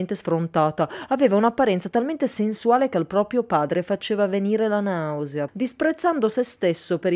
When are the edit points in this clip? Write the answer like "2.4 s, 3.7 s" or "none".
5.5 s